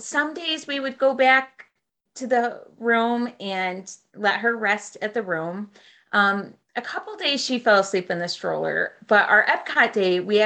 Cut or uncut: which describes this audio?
uncut